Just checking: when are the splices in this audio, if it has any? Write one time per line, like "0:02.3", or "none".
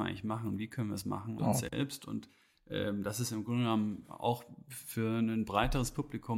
0:01.4

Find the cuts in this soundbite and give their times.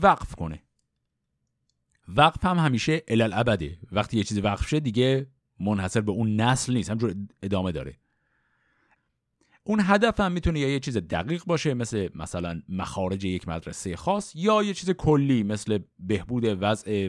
none

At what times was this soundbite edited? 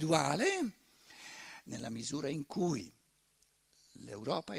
none

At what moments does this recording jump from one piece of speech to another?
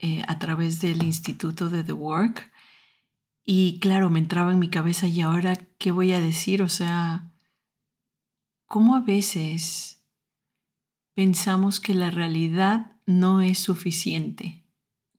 none

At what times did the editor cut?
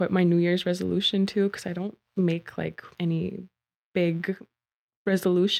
none

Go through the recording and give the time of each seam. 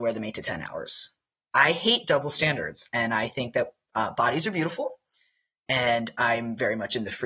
0:01.5

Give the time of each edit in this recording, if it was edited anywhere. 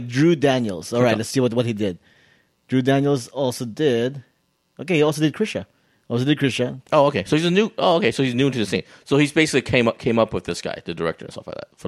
0:06.8

